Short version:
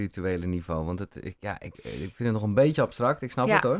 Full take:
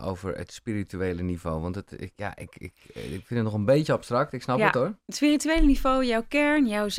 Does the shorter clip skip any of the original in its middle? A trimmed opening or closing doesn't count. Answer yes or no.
yes